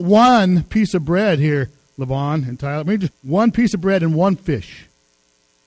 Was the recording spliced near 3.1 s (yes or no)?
yes